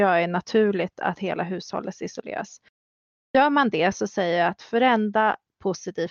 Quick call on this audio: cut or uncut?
uncut